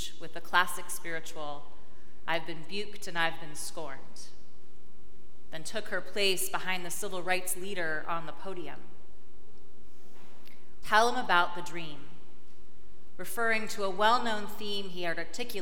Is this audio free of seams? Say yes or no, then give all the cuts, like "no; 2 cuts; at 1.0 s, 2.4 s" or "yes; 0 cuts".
no; 1 cut; at 10.8 s